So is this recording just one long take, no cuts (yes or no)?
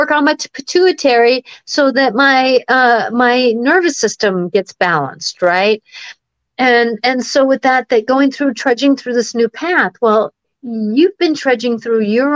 yes